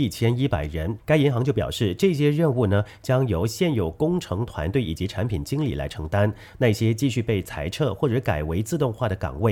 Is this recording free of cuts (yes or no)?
no